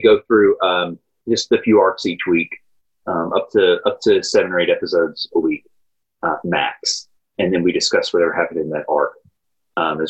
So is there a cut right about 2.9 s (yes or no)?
no